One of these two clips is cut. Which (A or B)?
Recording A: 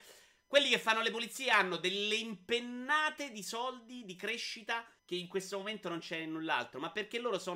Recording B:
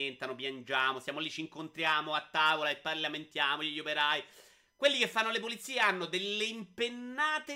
A